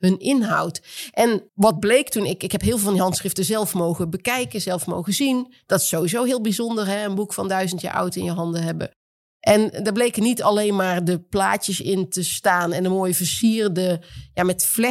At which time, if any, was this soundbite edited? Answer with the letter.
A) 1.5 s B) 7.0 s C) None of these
A